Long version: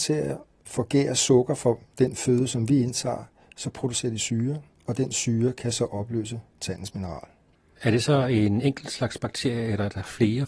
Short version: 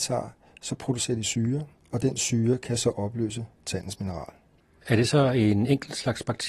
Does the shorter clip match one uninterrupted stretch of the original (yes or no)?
yes